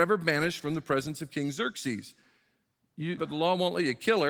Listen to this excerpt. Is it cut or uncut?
cut